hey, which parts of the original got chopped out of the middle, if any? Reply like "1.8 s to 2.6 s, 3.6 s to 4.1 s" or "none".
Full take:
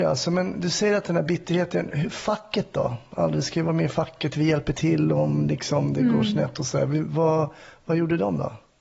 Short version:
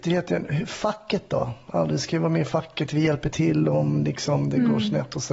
none

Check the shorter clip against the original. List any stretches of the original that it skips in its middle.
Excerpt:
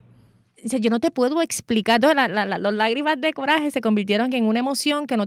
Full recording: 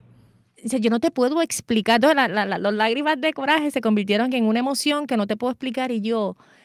none

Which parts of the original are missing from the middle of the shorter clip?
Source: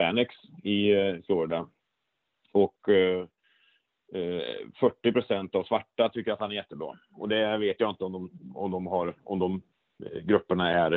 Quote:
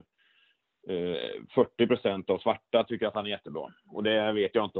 none

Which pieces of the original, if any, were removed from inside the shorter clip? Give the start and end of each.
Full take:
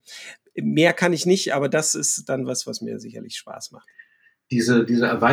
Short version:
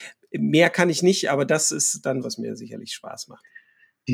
2.4 s to 2.6 s

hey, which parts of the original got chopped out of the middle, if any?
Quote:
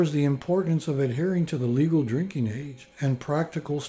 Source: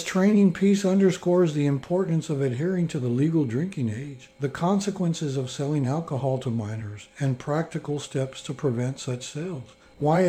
4.3 s to 7.1 s

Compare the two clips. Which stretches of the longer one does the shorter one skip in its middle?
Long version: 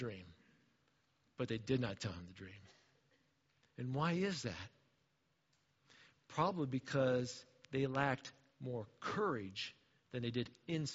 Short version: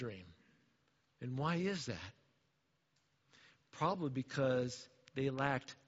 1.1 s to 3.7 s

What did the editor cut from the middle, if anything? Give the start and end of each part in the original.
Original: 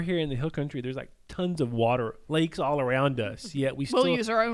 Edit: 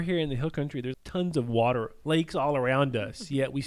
0.9 s to 1.2 s

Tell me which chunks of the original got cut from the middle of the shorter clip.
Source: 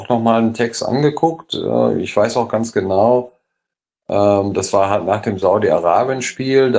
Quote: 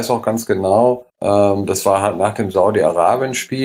3.4 s to 4.0 s

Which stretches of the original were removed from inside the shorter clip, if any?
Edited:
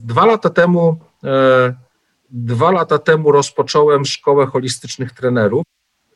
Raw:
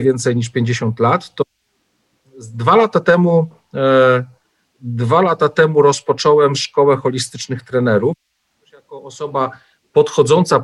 none

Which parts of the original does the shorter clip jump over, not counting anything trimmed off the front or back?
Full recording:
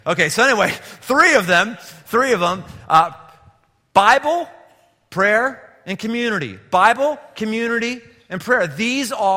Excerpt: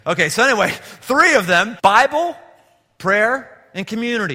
1.8 s to 3.9 s

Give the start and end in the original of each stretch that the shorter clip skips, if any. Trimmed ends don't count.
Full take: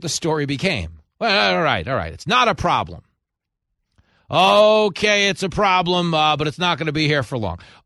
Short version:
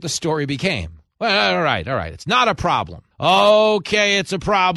3.1 s to 4.2 s

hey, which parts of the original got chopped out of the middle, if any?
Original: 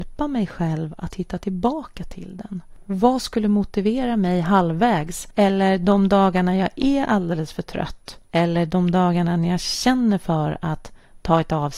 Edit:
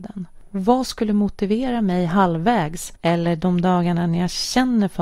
5.3 s to 8.3 s

